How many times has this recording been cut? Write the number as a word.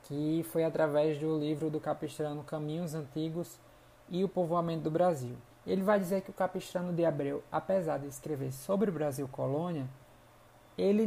one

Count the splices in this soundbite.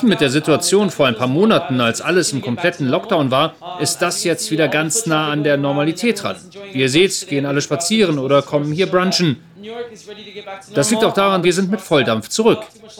one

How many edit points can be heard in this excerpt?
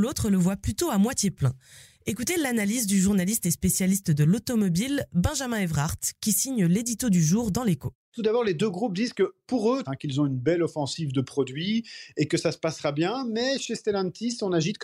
one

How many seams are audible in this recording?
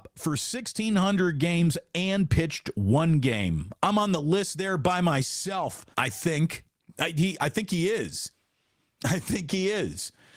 one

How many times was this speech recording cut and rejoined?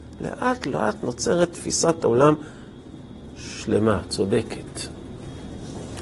zero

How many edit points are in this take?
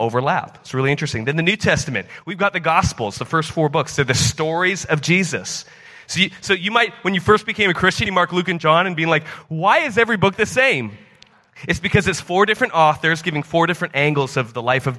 one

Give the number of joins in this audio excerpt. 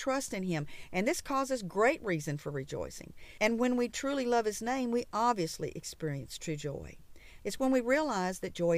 two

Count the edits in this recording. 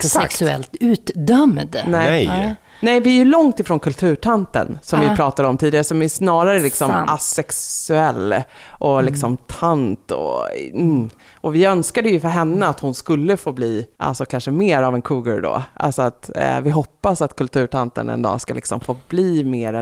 one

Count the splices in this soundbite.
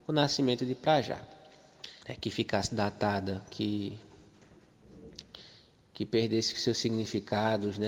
one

